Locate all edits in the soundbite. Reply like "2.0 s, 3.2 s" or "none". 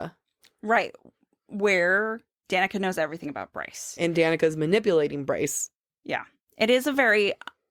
none